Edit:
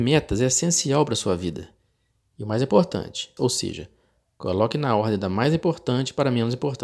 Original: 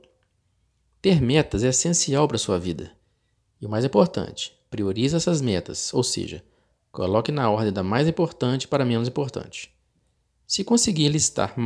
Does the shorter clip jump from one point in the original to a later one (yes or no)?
yes